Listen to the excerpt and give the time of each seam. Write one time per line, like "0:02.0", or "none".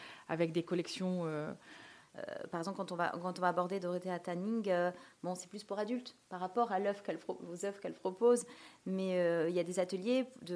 0:02.0